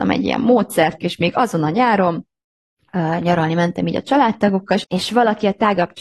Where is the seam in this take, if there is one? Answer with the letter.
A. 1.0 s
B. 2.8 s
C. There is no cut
A